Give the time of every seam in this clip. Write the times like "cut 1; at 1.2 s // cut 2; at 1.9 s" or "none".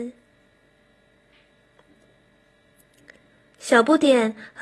none